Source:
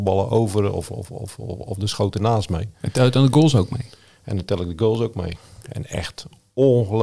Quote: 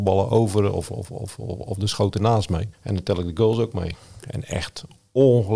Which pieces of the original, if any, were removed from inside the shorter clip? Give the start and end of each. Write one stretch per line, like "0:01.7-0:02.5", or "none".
0:02.7-0:04.1